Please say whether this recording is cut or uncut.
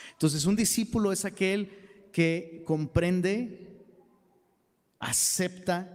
uncut